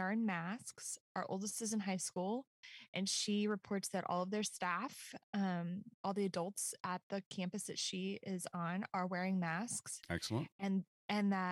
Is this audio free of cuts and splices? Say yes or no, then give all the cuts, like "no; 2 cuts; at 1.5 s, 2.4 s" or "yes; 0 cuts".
yes; 0 cuts